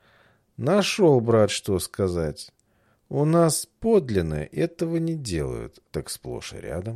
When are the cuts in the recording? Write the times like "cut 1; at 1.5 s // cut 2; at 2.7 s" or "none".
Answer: cut 1; at 5.8 s